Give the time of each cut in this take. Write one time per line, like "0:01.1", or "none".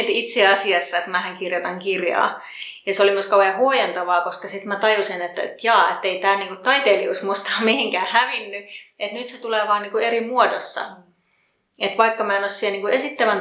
none